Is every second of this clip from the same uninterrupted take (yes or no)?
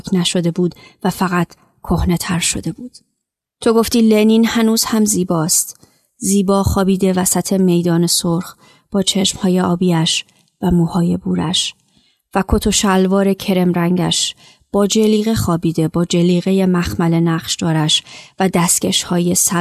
no